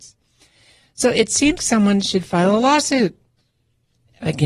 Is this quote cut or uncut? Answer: cut